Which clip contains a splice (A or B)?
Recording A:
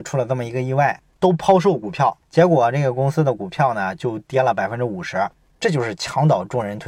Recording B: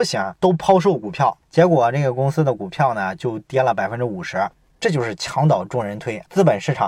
A